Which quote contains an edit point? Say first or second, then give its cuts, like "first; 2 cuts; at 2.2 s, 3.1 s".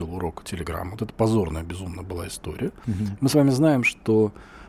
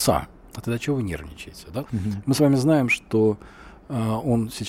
second; 1 cut; at 1.9 s